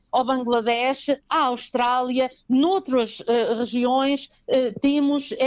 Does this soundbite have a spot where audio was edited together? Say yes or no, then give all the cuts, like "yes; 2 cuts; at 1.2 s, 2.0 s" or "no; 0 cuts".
no; 0 cuts